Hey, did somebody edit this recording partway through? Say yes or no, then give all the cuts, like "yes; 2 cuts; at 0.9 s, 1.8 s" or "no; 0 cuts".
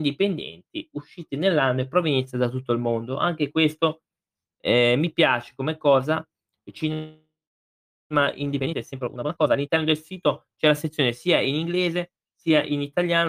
no; 0 cuts